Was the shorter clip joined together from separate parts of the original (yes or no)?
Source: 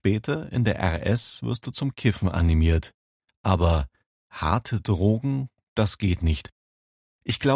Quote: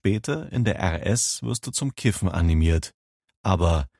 no